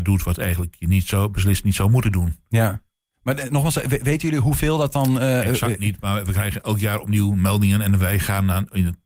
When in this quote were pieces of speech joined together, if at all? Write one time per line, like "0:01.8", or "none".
none